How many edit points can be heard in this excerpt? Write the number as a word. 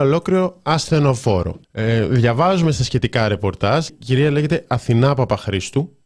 two